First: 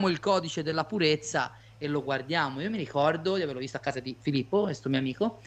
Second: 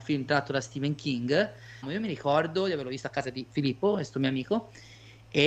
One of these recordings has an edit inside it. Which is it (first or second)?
second